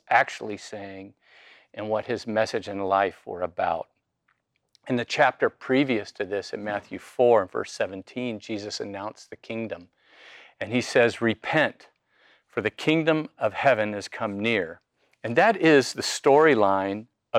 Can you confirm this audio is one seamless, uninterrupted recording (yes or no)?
yes